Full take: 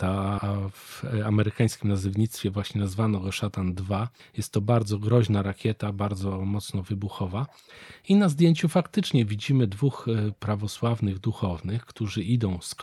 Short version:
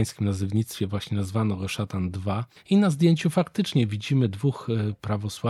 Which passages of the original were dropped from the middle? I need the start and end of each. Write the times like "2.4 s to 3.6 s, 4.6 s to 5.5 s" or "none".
4.2 s to 8.0 s